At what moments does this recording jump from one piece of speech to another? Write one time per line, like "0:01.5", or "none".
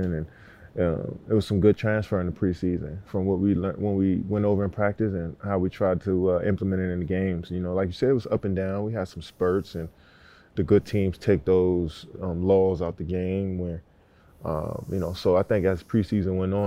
none